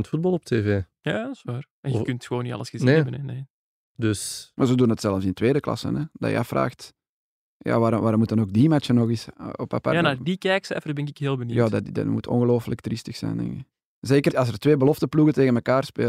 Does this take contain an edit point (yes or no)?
yes